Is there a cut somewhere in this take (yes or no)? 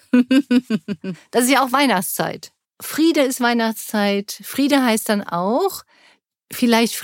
no